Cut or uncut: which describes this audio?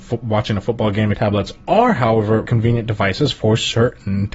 cut